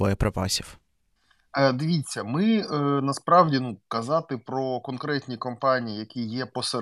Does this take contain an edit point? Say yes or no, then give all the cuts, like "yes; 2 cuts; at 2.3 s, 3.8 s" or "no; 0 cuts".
no; 0 cuts